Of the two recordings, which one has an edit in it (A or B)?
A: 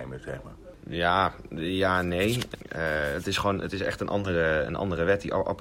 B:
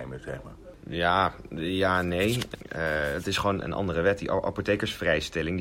B